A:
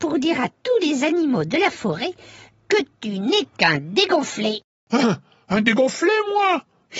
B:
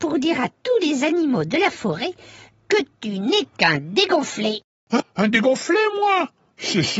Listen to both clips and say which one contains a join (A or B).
B